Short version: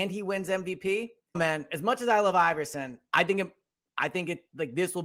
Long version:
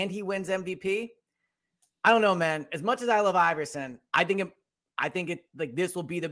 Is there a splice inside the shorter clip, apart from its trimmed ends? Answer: yes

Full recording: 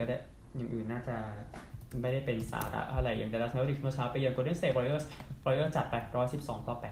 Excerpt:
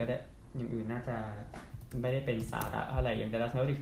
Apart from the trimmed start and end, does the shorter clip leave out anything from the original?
no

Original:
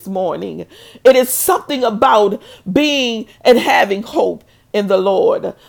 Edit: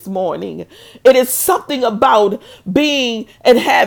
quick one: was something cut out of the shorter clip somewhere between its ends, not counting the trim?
no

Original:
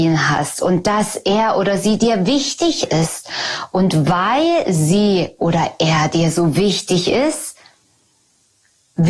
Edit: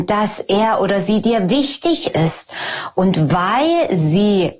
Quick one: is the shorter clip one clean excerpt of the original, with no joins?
yes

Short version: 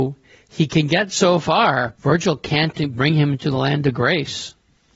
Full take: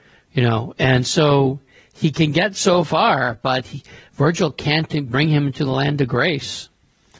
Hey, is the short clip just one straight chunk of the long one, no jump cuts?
no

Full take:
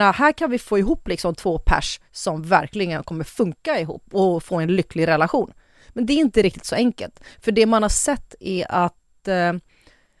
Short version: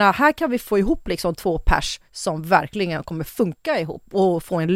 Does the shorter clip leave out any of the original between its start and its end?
no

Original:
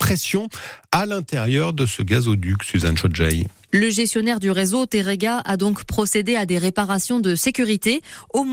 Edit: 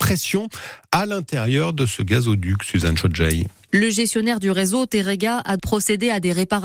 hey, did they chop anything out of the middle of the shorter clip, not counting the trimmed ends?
yes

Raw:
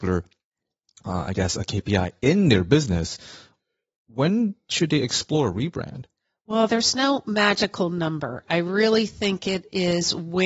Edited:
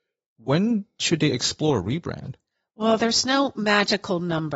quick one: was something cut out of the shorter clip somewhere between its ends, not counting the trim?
no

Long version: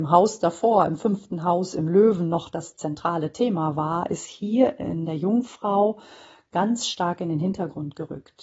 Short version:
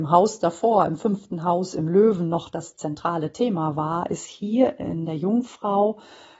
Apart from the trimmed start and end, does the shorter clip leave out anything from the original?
no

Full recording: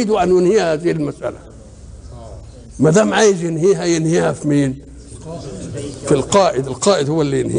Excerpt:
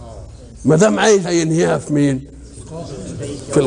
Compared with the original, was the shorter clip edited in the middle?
yes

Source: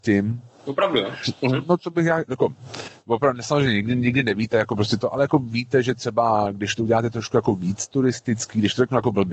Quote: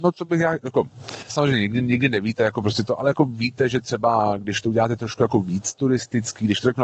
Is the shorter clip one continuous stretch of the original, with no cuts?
no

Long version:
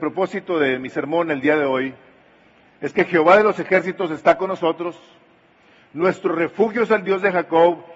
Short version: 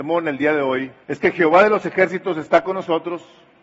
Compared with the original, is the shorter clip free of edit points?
no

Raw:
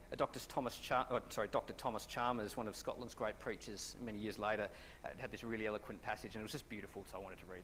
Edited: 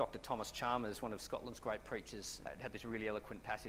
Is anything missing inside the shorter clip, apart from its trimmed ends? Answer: yes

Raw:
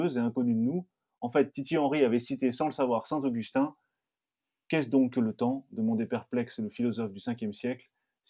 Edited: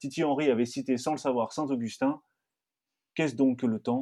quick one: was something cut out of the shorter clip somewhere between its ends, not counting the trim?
no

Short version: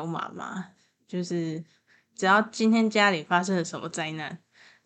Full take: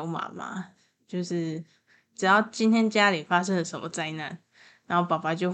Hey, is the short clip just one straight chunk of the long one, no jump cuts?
yes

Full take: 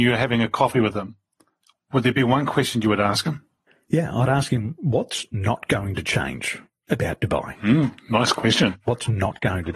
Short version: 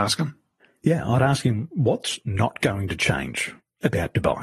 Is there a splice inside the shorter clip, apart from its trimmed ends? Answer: no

